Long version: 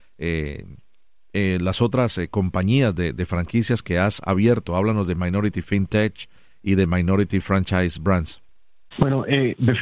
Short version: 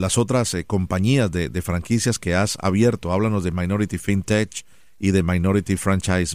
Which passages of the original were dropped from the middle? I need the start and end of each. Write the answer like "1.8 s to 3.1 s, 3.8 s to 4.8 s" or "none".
none